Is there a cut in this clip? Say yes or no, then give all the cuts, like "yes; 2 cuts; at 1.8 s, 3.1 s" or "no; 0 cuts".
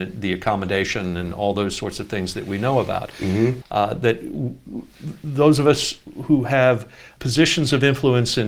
yes; 2 cuts; at 3.6 s, 7.2 s